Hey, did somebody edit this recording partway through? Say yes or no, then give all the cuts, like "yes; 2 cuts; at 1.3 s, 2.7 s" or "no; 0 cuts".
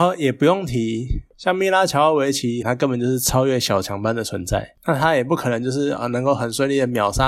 yes; 3 cuts; at 1.3 s, 2.6 s, 4.8 s